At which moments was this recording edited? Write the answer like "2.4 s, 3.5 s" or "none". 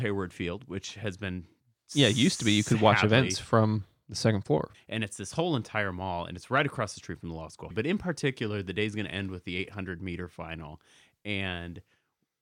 4.7 s, 7.7 s